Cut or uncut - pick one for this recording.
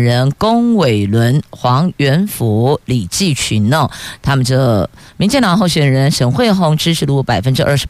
cut